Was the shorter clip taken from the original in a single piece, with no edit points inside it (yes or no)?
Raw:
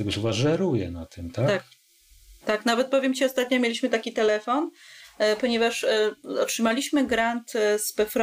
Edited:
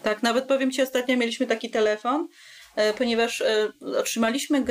yes